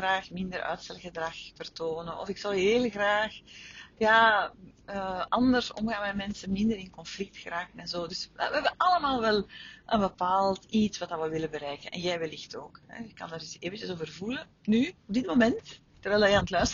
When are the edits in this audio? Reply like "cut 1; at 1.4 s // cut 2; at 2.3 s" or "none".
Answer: cut 1; at 15.0 s